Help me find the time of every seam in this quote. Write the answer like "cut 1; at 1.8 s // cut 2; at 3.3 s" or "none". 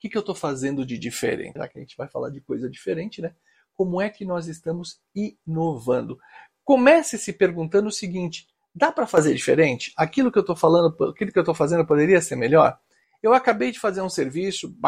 cut 1; at 1.6 s